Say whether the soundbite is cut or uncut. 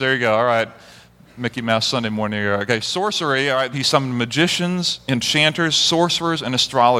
cut